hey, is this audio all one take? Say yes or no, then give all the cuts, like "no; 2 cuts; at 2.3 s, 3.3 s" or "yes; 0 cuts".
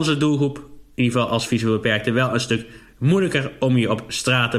yes; 0 cuts